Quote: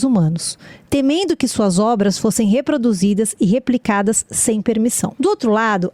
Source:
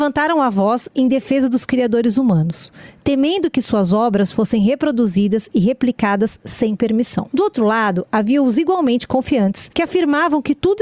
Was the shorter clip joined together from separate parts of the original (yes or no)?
no